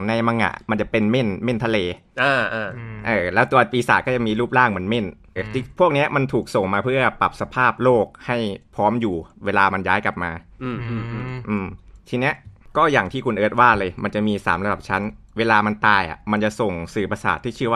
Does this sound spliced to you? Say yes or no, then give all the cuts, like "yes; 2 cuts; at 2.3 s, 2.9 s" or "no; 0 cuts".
yes; 1 cut; at 5.4 s